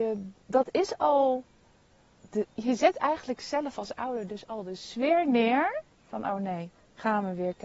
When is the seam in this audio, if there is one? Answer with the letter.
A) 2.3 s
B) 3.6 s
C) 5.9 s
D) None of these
D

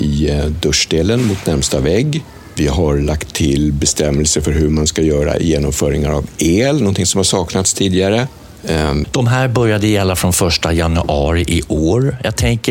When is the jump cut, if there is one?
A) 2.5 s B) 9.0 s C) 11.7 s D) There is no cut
B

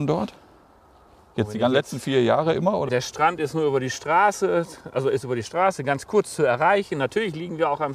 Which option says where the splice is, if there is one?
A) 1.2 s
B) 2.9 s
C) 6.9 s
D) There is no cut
B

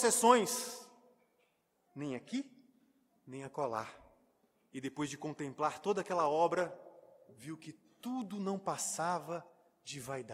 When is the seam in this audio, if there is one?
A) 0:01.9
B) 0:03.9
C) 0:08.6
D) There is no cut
A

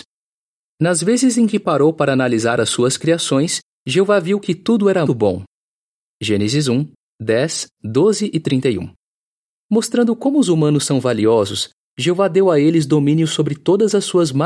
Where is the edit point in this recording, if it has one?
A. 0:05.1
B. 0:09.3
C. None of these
A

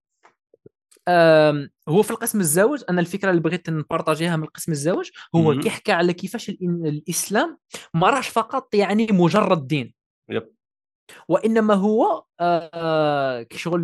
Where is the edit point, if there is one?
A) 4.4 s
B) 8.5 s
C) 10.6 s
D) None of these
D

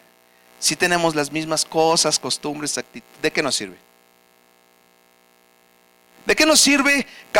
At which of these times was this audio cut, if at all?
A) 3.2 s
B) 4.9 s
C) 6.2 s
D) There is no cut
D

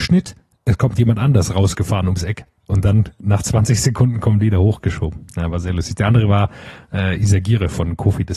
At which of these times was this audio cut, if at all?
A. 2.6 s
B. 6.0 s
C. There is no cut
C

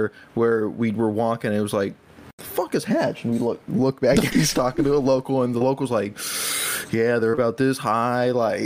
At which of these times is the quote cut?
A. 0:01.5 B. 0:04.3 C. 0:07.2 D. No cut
B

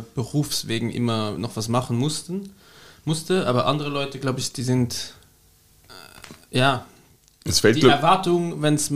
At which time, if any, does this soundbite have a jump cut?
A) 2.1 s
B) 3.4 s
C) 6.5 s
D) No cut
D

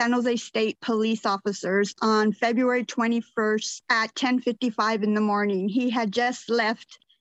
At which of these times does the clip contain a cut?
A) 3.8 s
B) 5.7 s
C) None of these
A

